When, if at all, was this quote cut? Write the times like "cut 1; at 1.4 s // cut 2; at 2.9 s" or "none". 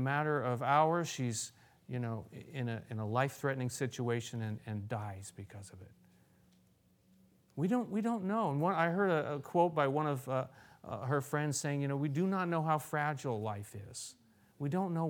none